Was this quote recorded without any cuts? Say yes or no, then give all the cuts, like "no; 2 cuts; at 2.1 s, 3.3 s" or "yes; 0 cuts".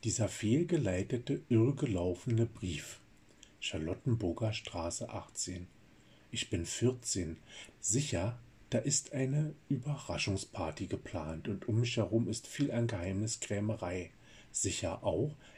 no; 1 cut; at 7.7 s